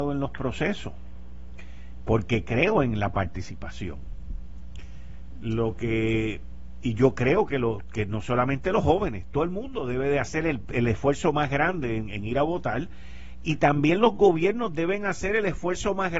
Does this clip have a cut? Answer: no; 0 cuts

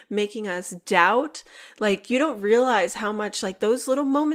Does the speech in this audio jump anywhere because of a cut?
no; 0 cuts

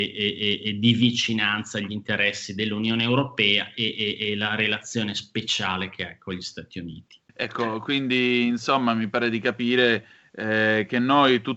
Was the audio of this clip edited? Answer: yes; 1 cut; at 7.3 s

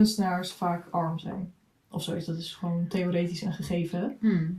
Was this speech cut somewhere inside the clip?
no; 0 cuts

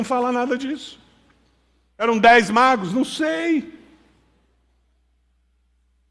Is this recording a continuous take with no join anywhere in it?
yes; 0 cuts

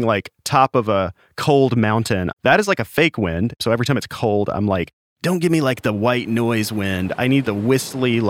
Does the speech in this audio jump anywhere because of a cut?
yes; 1 cut; at 2.3 s

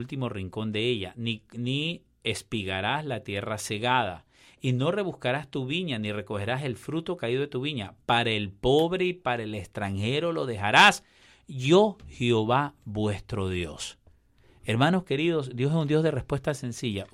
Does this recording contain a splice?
no; 0 cuts

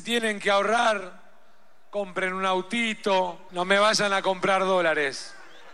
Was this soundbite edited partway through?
yes; 1 cut; at 3.5 s

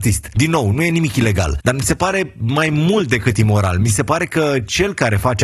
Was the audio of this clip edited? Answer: no; 0 cuts

